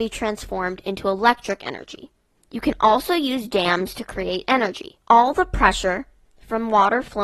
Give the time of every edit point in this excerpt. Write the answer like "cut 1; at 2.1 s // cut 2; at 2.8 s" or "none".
cut 1; at 2.4 s // cut 2; at 5.0 s